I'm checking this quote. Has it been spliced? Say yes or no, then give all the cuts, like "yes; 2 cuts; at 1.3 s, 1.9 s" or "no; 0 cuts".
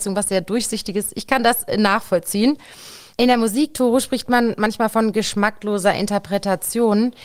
yes; 1 cut; at 3.1 s